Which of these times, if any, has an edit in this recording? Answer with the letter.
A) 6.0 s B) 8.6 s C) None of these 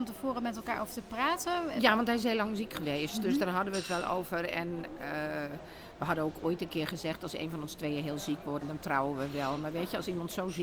B